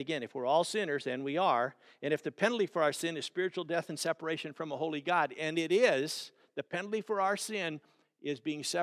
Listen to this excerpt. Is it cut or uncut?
uncut